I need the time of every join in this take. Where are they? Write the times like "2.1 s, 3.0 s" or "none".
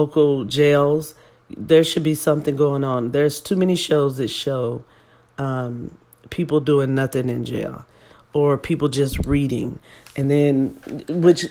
none